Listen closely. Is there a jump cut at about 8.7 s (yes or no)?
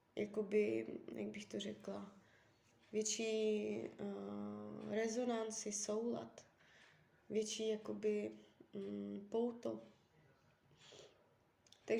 no